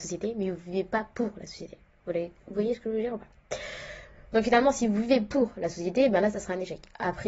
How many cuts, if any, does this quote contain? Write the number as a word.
zero